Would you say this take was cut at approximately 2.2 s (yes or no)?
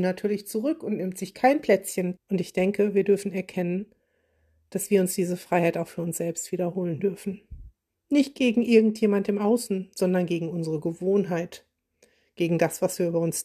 yes